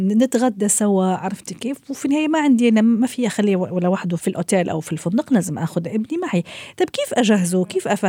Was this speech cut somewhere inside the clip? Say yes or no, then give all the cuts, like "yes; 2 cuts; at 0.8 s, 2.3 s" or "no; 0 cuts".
yes; 1 cut; at 4.2 s